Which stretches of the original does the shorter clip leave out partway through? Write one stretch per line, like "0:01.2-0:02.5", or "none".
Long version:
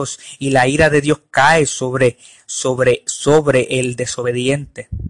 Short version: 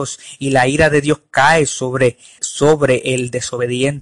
0:02.4-0:03.0